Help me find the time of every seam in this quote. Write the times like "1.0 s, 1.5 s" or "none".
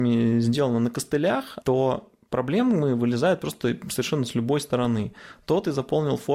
1.6 s